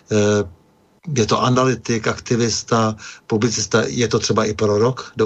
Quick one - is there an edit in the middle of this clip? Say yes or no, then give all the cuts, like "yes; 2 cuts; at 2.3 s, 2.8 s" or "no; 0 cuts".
no; 0 cuts